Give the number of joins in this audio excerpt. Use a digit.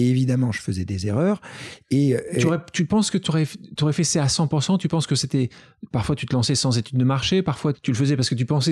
1